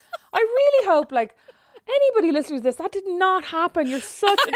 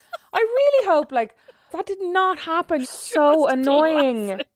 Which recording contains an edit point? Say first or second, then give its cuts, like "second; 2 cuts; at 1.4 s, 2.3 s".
second; 2 cuts; at 1.7 s, 2.8 s